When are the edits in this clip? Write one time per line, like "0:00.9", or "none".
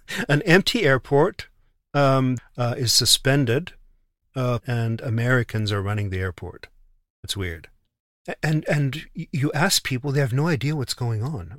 0:02.4
0:04.6